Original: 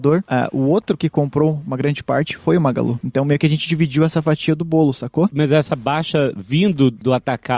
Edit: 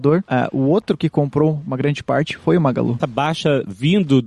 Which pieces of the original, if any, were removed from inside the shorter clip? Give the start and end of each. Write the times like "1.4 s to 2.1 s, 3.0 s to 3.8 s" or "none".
3.0 s to 5.7 s